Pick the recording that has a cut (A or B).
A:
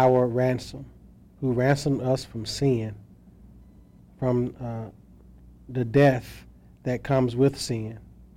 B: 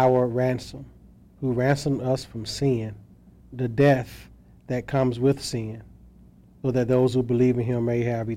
B